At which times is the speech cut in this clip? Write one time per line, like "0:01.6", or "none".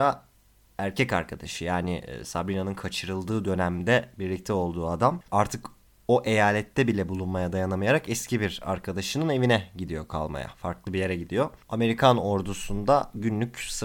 0:11.6